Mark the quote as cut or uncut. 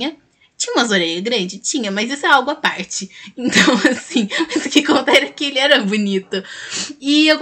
uncut